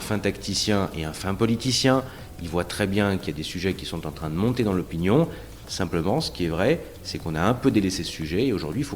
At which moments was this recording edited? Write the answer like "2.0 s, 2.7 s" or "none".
5.6 s

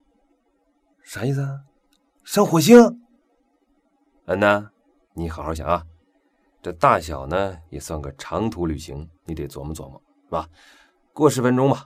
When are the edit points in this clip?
5.6 s

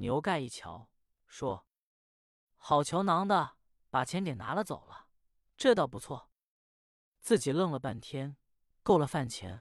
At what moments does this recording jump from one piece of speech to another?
8.7 s

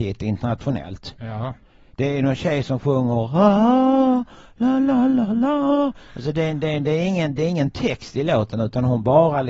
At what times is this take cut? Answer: none

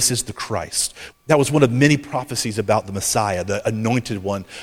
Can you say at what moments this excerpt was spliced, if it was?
1.1 s

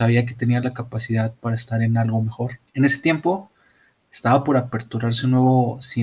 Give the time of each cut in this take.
2.7 s

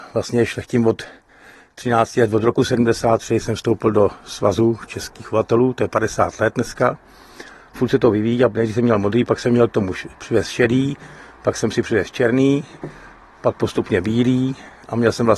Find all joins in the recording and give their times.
none

